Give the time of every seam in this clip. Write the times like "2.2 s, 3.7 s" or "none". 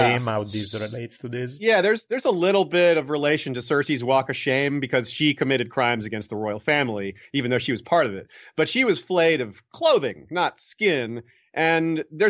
none